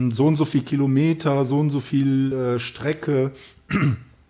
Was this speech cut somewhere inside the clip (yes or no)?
no